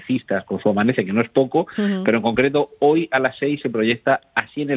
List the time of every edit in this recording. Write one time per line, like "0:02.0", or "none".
none